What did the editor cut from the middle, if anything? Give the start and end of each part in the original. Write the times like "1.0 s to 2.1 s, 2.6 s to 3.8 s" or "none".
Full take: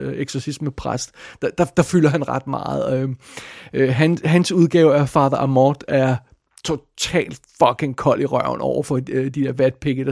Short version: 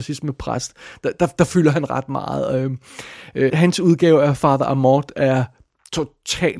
3.9 s to 4.2 s